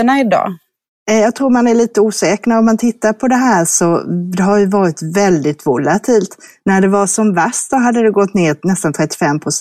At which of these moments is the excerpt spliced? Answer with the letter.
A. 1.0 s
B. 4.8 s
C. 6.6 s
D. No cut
D